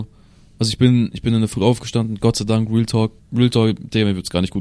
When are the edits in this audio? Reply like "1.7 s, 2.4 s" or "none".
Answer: 3.2 s